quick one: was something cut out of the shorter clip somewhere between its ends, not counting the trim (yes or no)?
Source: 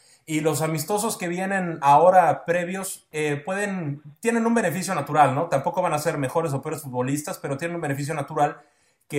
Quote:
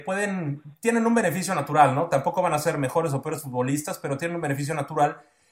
no